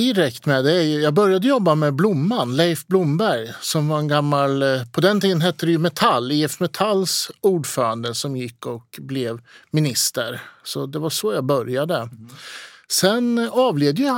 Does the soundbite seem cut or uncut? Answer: uncut